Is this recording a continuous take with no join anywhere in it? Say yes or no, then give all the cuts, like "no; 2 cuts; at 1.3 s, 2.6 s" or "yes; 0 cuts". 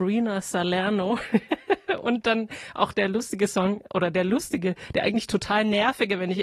yes; 0 cuts